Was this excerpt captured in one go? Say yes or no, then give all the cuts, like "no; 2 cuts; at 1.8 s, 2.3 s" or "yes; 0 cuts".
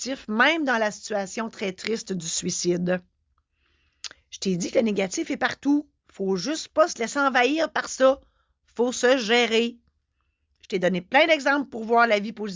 yes; 0 cuts